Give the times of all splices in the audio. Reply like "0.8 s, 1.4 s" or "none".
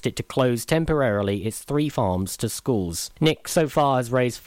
none